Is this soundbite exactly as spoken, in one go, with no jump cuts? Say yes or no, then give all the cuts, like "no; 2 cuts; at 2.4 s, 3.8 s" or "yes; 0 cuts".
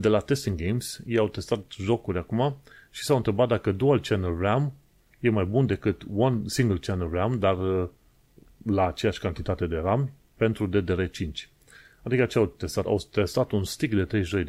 yes; 0 cuts